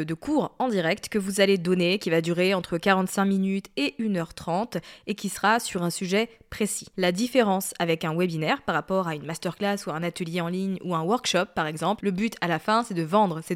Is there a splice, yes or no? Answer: yes